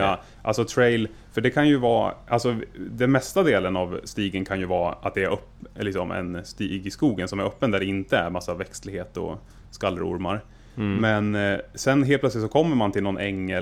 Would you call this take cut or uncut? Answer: uncut